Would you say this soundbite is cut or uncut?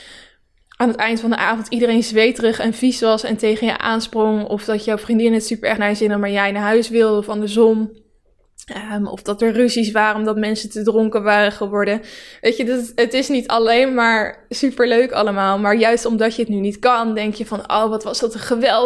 uncut